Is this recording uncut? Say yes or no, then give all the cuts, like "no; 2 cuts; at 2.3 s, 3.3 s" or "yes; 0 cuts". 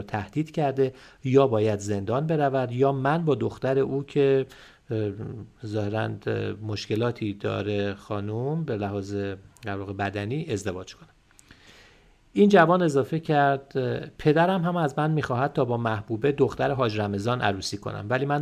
yes; 0 cuts